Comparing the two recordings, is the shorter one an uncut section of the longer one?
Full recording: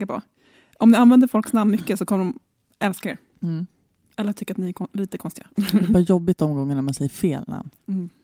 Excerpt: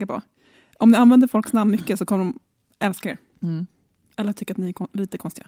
yes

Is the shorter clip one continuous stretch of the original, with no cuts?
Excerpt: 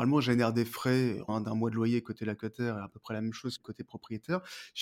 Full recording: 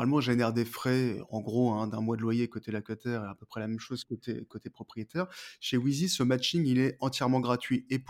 no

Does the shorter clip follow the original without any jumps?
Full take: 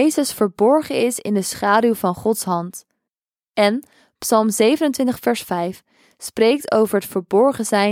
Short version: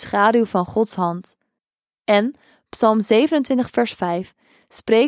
yes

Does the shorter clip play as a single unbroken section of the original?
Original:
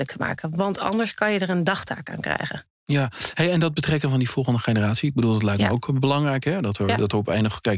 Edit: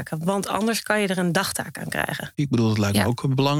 no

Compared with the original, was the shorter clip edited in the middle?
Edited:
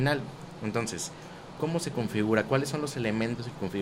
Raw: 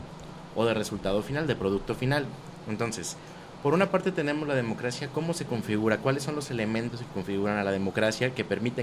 yes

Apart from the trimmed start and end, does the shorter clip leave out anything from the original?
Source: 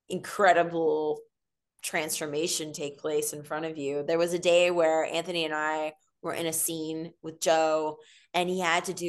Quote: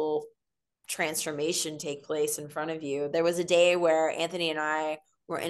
no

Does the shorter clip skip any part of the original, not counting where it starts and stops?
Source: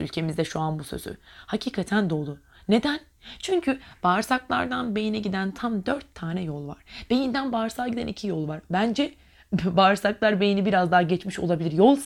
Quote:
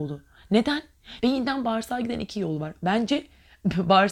yes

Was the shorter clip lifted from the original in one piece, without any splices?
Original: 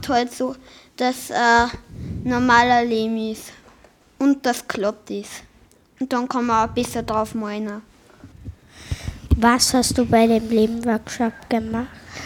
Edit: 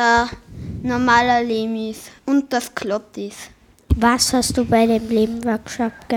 no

